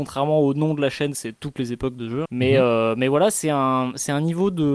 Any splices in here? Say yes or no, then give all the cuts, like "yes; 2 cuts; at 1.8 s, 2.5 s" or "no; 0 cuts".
yes; 1 cut; at 2.3 s